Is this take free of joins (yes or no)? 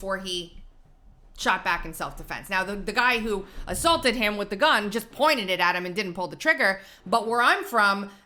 yes